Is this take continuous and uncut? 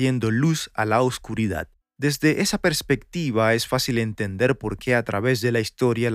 no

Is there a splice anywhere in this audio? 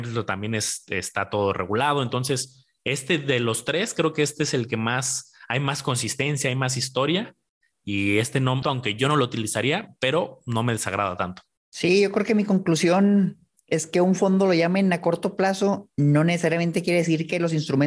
yes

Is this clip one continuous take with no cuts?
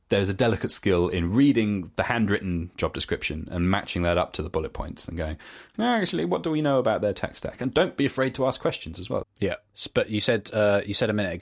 no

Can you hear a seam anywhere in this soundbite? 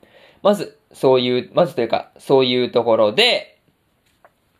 no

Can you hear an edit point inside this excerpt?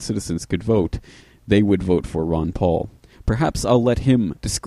yes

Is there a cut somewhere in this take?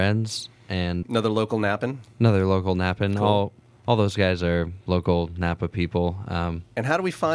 yes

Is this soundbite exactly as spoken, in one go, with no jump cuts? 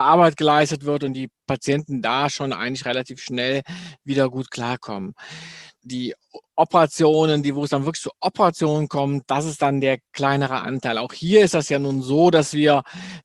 yes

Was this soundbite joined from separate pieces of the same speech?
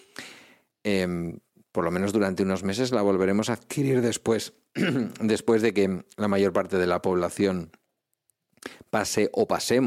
no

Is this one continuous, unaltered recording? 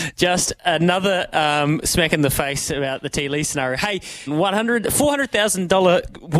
no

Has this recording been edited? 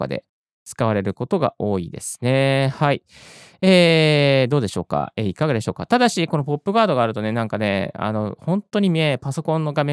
no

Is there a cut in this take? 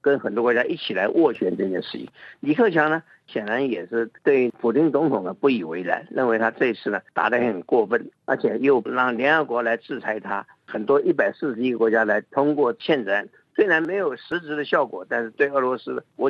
yes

